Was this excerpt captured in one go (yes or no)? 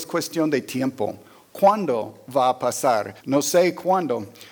no